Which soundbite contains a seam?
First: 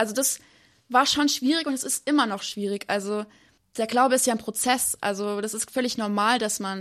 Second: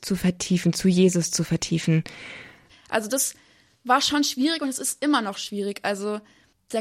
second; 1 cut; at 2.7 s

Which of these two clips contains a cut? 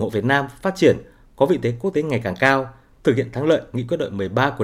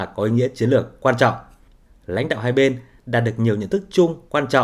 second; 1 cut; at 1.9 s

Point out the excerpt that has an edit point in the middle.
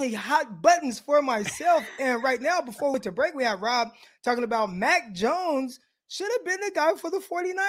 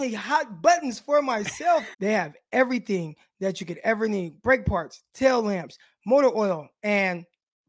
second; 1 cut; at 1.9 s

